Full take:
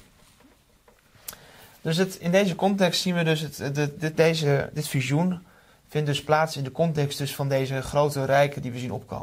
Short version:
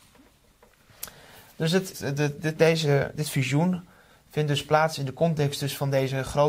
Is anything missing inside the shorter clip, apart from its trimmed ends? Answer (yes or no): yes